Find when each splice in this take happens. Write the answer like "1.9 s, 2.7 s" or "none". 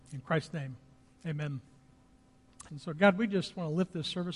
2.7 s